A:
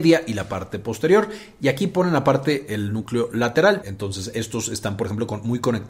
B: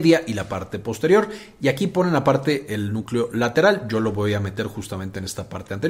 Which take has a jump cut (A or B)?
A